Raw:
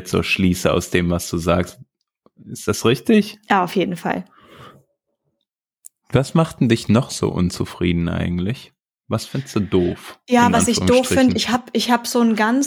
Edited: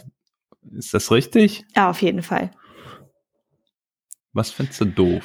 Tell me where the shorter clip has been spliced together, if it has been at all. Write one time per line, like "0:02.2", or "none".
0:04.2